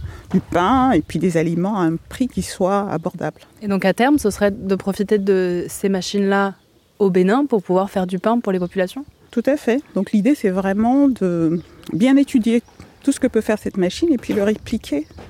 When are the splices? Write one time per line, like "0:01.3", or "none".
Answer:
0:03.5